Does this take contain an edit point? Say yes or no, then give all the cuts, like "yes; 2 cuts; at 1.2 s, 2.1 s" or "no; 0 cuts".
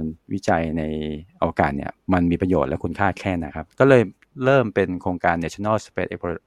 yes; 1 cut; at 3.5 s